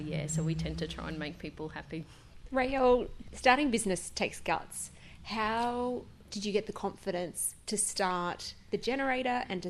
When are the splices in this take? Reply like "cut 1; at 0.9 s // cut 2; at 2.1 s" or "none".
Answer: none